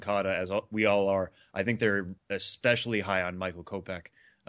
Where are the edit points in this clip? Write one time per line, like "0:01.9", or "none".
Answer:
none